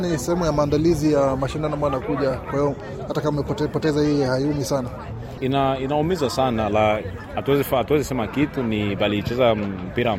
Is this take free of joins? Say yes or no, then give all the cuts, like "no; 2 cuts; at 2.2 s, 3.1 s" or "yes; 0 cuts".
yes; 0 cuts